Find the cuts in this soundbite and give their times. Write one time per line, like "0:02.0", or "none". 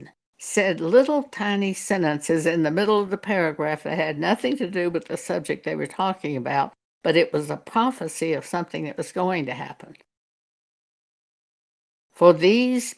0:12.0